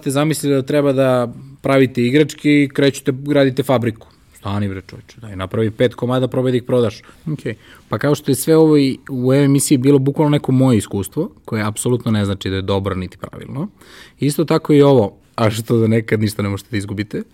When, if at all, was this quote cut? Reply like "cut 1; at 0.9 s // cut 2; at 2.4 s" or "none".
cut 1; at 7.1 s // cut 2; at 15.2 s